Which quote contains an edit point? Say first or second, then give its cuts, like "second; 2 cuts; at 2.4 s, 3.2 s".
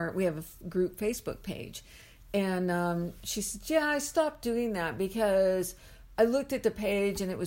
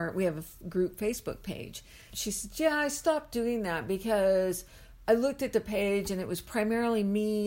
second; 1 cut; at 2.1 s